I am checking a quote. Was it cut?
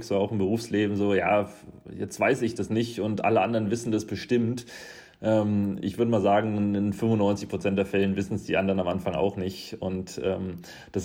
no; 0 cuts

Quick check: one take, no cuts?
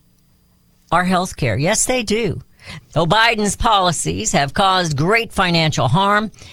no; 1 cut; at 2.8 s

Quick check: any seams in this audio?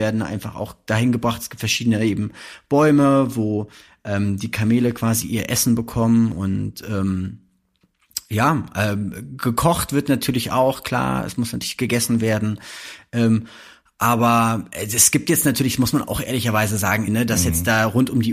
yes; 1 cut; at 17.1 s

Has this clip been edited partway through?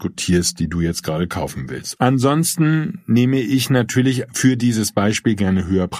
yes; 1 cut; at 2.0 s

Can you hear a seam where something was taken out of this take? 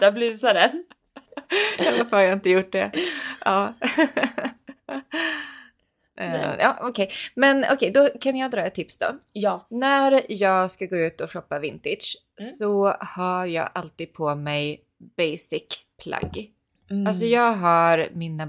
no; 0 cuts

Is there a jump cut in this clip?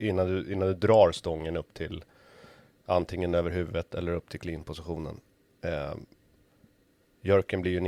no; 0 cuts

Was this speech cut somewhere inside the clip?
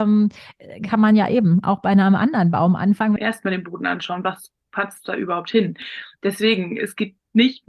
yes; 1 cut; at 3.2 s

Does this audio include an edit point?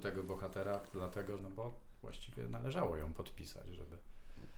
yes; 1 cut; at 1.4 s

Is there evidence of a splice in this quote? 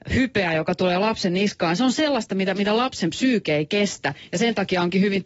no; 0 cuts

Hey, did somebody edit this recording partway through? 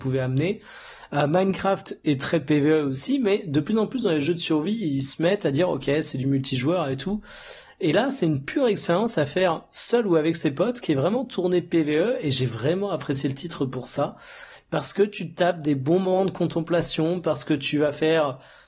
no; 0 cuts

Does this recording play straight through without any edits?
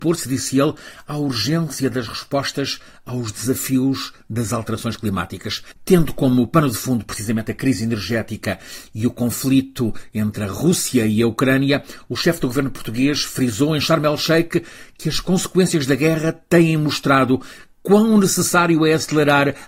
no; 1 cut; at 5.8 s

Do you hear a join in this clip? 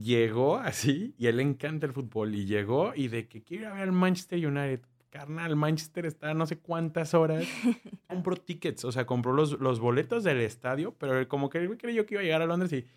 yes; 1 cut; at 8.1 s

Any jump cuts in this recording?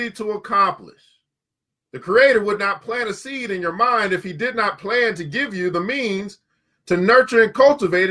no; 0 cuts

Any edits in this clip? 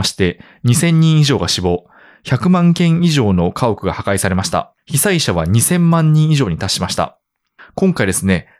no; 0 cuts

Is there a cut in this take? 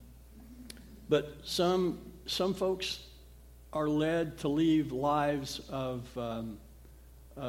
no; 0 cuts

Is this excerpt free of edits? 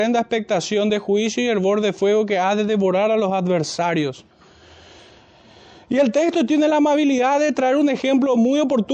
yes; 0 cuts

